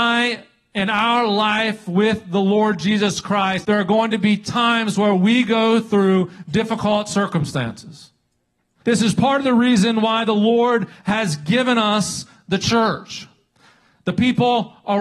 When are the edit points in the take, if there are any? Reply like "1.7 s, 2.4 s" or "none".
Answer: 3.6 s, 8.8 s